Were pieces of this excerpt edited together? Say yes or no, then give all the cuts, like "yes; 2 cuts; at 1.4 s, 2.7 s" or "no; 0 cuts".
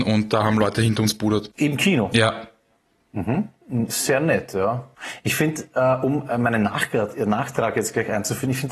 no; 0 cuts